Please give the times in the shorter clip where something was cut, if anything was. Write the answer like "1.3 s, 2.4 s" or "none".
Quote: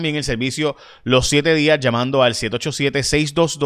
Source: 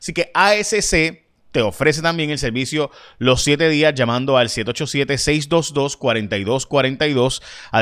none